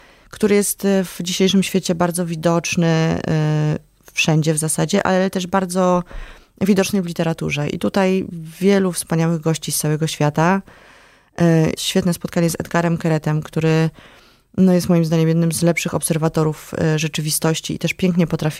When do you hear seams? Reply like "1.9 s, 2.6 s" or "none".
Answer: 11.8 s